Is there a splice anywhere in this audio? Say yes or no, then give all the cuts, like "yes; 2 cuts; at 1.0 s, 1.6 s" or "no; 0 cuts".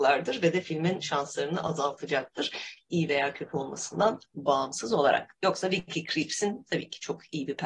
no; 0 cuts